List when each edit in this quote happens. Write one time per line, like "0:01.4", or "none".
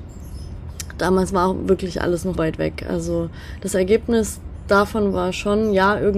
0:02.3

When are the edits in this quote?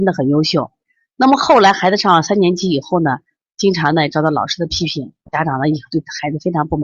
0:03.4
0:05.3

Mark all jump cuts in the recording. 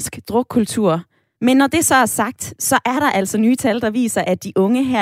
0:01.4

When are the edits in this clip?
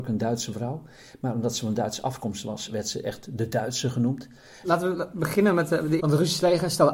0:04.6
0:06.0

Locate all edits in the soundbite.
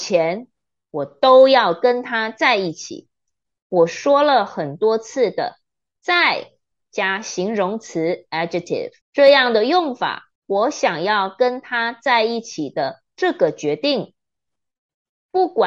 0:03.6
0:09.0
0:10.4

